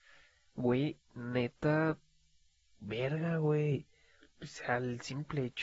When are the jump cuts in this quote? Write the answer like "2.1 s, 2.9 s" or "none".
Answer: 4.2 s